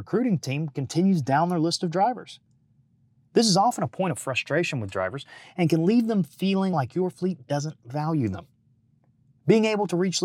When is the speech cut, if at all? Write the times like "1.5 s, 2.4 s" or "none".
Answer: none